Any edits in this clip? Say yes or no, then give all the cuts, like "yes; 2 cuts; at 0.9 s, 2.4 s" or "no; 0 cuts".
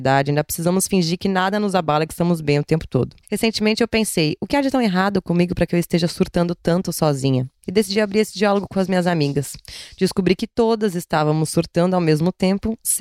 no; 0 cuts